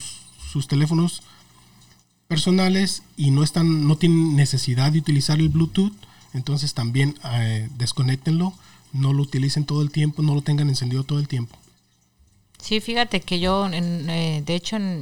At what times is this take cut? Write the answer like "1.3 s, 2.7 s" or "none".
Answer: none